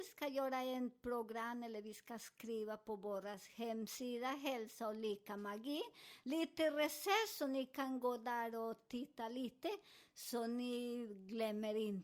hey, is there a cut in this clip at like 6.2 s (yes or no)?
no